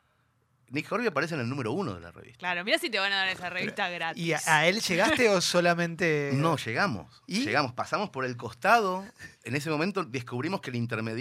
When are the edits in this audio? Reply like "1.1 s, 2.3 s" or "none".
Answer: none